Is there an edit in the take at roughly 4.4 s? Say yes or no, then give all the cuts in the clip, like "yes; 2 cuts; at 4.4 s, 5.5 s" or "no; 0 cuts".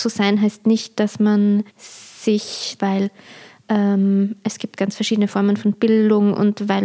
no; 2 cuts; at 1.7 s, 2.8 s